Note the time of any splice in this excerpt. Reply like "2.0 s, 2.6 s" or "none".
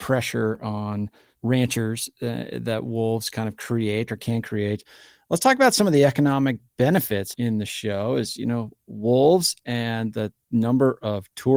7.3 s